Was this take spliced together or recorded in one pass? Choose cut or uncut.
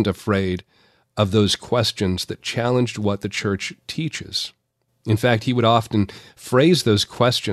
uncut